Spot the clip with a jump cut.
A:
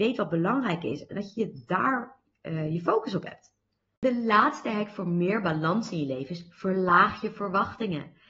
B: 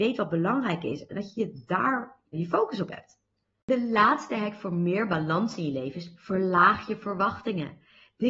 B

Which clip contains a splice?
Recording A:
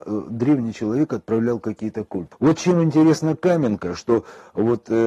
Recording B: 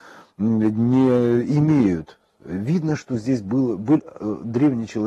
A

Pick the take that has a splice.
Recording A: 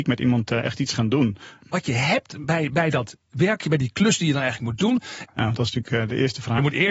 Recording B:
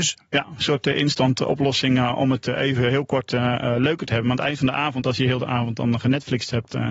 A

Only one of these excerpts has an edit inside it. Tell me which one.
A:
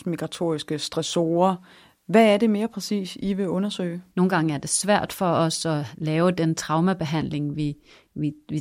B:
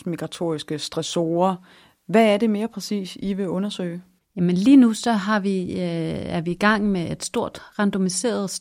A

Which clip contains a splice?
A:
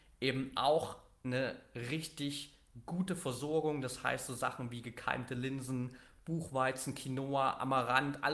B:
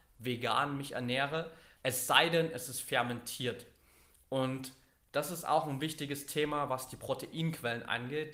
B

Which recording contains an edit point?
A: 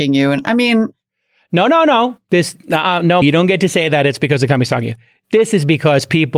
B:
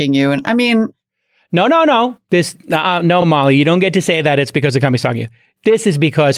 A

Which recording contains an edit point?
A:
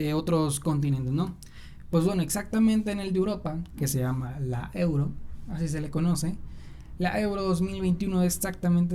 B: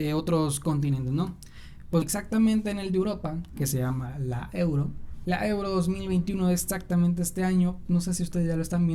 B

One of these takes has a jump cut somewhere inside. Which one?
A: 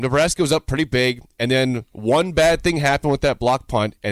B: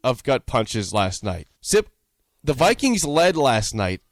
B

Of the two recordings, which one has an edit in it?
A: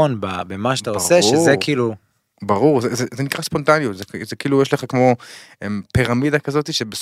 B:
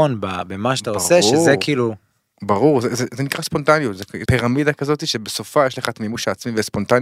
B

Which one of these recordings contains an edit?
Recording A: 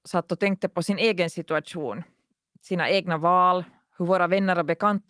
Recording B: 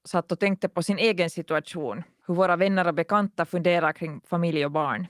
B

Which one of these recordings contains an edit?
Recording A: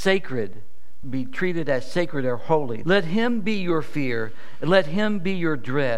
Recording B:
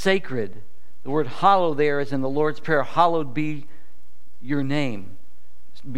A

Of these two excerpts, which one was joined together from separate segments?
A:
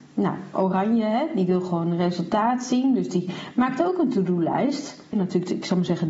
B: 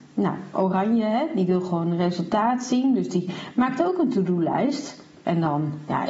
A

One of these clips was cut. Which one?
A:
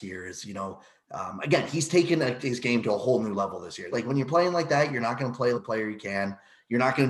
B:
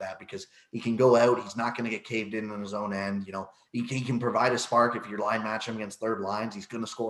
A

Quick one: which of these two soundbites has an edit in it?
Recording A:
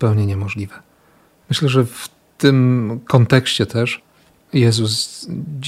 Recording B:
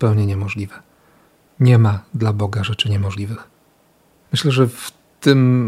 A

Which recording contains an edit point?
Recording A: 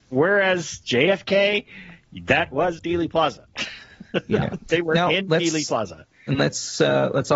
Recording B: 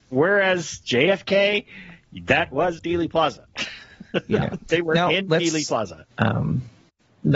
B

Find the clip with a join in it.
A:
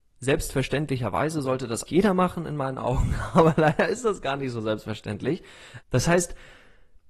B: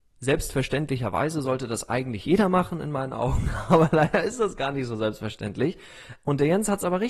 A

